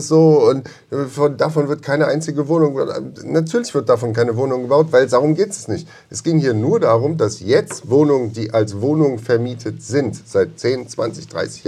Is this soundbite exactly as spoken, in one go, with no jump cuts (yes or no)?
yes